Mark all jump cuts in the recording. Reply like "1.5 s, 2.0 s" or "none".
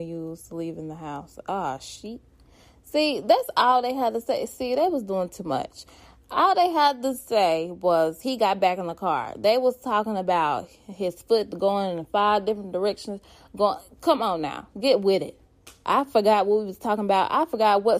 none